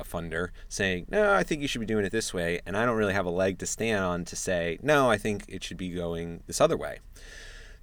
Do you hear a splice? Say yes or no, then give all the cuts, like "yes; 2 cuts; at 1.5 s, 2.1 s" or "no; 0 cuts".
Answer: no; 0 cuts